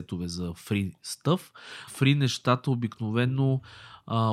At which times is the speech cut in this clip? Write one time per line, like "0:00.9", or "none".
0:01.9